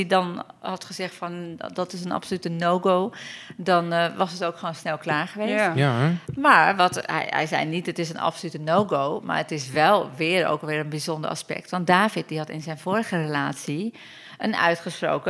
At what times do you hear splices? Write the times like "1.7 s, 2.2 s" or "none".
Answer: none